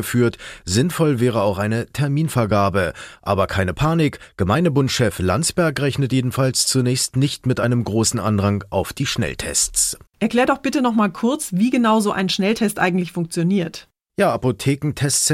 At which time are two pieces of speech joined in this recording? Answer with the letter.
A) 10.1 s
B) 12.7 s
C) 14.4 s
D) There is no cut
A